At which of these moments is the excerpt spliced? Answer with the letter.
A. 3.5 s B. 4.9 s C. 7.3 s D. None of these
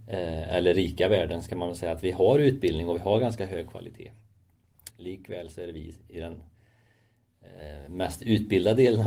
B